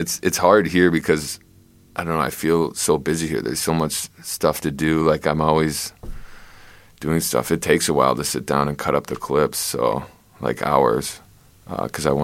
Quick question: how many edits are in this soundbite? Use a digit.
0